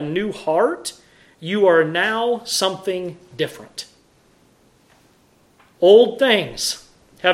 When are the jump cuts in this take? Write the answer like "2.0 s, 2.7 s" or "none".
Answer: none